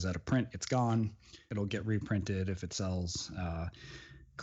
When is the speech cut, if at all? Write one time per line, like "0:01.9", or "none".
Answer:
none